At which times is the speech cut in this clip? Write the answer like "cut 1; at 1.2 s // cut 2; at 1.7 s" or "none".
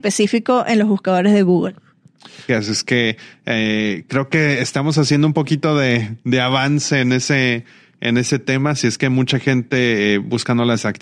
cut 1; at 2.5 s